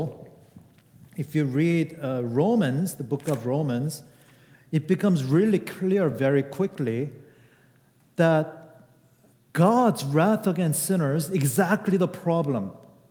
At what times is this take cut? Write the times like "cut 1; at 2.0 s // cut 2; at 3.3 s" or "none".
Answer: none